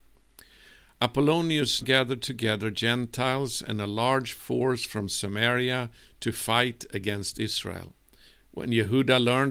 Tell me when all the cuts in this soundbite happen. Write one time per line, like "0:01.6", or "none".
0:01.8